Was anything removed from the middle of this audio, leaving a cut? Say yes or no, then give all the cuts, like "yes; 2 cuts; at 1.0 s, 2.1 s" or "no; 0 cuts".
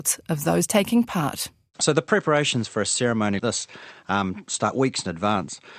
yes; 1 cut; at 3.4 s